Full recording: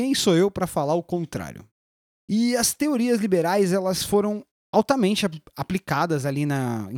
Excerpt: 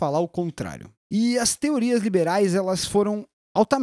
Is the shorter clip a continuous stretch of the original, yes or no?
no